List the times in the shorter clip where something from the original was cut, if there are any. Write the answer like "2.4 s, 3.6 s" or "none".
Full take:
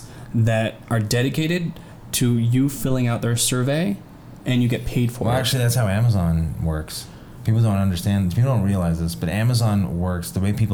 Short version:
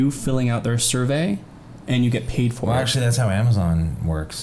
none